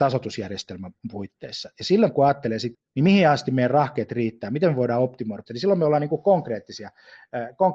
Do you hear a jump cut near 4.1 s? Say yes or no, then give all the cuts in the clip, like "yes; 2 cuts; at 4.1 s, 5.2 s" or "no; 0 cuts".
no; 2 cuts; at 2.7 s, 5.5 s